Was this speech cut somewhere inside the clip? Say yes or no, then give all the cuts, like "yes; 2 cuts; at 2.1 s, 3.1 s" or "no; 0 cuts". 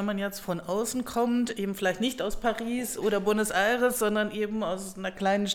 no; 0 cuts